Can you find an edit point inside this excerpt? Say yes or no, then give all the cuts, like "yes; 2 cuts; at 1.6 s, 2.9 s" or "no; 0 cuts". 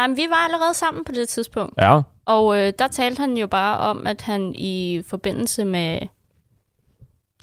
no; 0 cuts